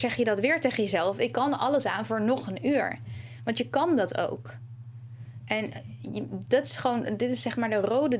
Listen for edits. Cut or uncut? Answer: uncut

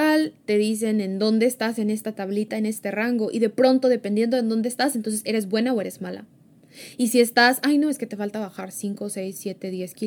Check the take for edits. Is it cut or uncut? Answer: uncut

